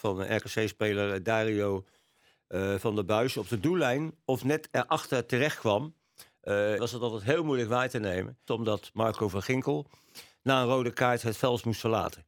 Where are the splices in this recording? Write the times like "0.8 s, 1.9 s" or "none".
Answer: 6.8 s, 8.5 s

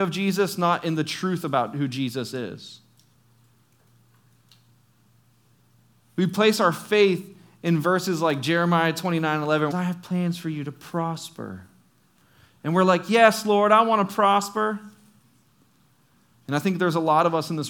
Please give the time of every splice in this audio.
9.7 s, 16.3 s

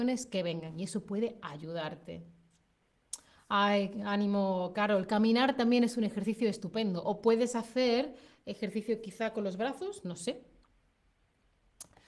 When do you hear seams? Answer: none

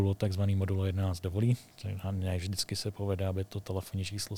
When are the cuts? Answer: none

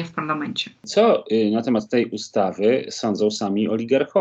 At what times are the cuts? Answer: none

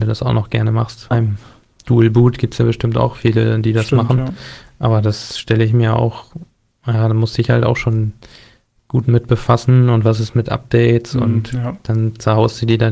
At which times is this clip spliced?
1.1 s

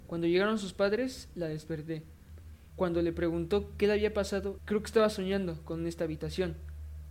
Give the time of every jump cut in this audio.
2.7 s, 4.6 s

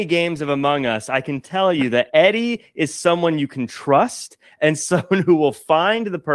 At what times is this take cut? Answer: none

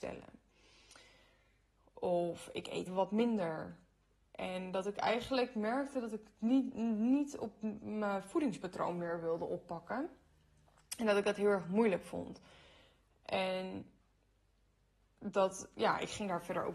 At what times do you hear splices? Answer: 2.9 s

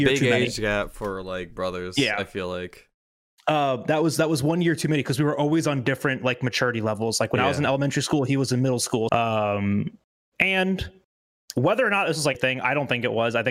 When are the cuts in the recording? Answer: 9.1 s, 12.3 s

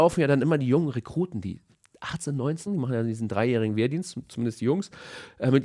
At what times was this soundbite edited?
2.7 s

